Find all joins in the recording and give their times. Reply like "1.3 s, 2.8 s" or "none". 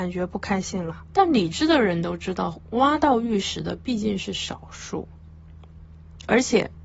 1.1 s